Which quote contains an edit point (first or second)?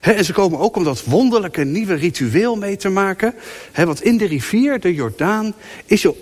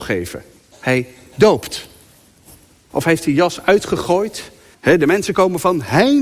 second